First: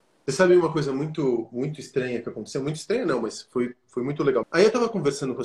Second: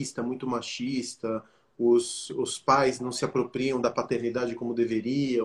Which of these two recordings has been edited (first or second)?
first